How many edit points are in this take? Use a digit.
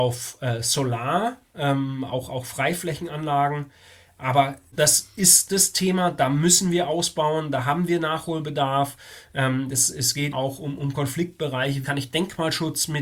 2